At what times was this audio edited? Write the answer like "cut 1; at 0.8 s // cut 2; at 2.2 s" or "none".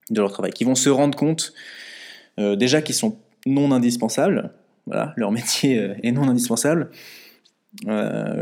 none